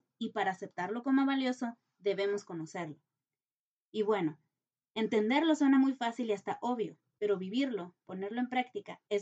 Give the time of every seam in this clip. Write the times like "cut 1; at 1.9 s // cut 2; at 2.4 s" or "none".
none